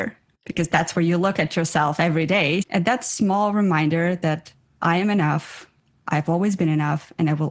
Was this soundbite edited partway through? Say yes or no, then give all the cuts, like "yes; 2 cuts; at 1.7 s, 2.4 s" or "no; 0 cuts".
yes; 1 cut; at 2.6 s